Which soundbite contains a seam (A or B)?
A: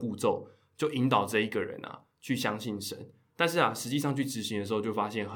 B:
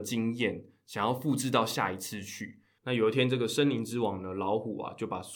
B